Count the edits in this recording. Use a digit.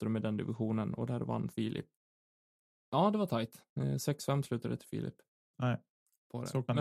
2